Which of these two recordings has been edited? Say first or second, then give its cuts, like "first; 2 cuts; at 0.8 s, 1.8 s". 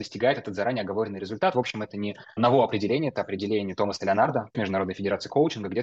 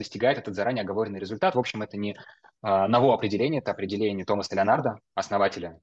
first; 2 cuts; at 2.4 s, 4.5 s